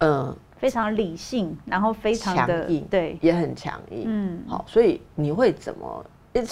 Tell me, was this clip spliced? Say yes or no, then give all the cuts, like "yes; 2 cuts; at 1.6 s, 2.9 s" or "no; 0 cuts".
no; 0 cuts